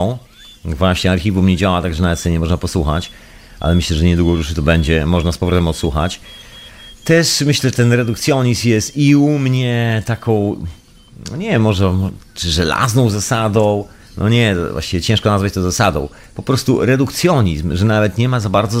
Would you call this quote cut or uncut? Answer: uncut